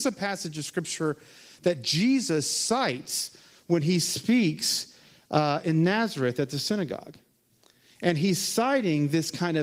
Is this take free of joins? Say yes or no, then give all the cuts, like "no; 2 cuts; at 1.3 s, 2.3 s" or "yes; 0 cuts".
yes; 0 cuts